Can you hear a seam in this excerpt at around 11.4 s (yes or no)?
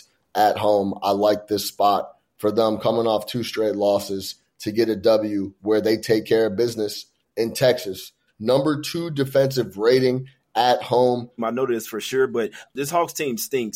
yes